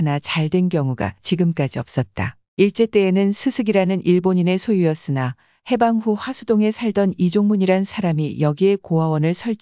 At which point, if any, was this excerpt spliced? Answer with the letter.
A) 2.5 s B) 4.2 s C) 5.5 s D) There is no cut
A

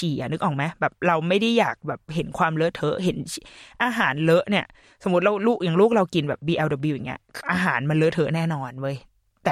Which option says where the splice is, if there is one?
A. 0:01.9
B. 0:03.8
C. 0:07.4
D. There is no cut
C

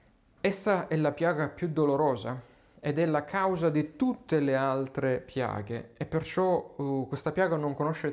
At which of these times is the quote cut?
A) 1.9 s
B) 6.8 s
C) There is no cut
C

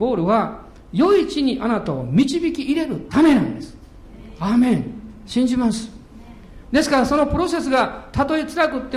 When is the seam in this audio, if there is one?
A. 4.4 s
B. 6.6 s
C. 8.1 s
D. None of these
D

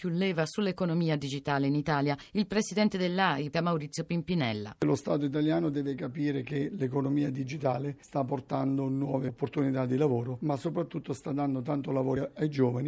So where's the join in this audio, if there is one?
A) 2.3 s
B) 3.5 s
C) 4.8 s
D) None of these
B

